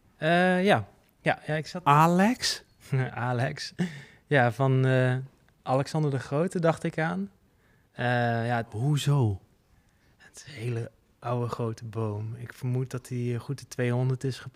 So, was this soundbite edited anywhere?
no; 0 cuts

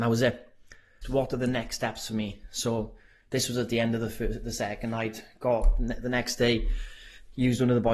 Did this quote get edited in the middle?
yes; 1 cut; at 1.0 s

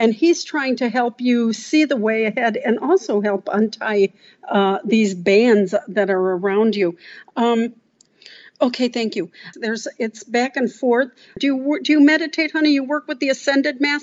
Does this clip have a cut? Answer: yes; 2 cuts; at 9.5 s, 11.4 s

